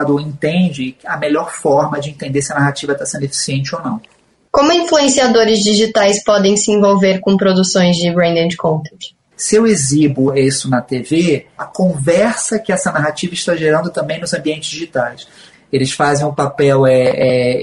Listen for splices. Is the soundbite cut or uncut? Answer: cut